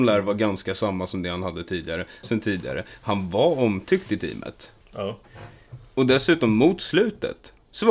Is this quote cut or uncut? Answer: cut